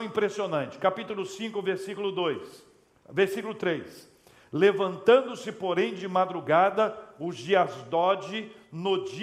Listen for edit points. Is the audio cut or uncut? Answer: uncut